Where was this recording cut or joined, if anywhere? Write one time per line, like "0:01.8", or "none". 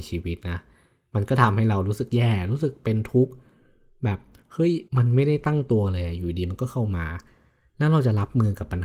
0:04.9